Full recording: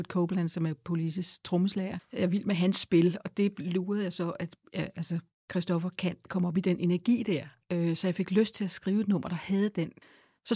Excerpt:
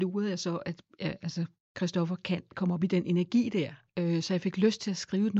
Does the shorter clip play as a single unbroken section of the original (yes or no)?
yes